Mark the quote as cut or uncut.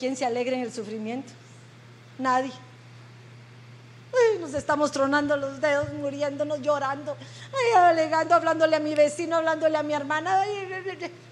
uncut